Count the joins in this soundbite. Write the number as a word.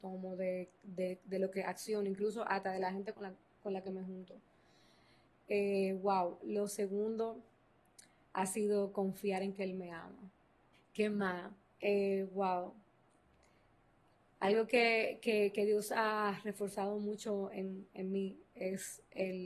one